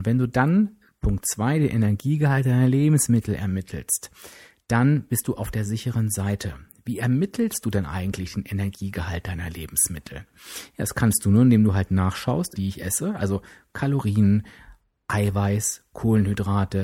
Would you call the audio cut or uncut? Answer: cut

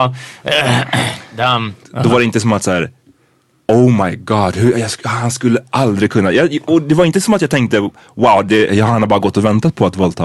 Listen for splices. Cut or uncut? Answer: cut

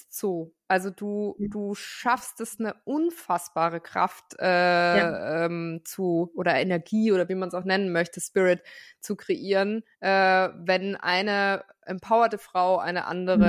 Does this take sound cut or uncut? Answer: uncut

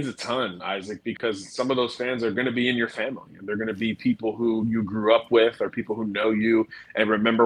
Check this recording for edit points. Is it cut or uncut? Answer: uncut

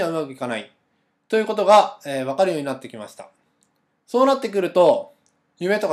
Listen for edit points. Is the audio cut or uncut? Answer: uncut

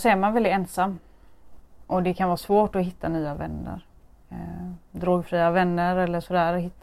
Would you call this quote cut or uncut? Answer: uncut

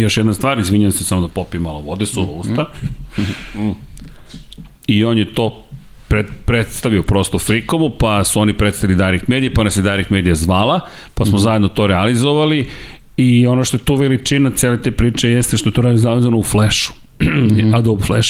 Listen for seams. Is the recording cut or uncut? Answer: cut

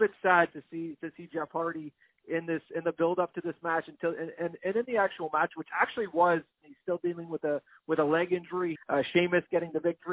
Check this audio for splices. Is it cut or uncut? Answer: cut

